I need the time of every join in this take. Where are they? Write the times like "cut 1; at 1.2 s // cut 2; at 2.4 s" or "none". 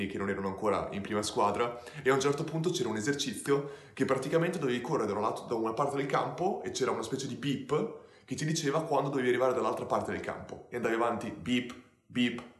none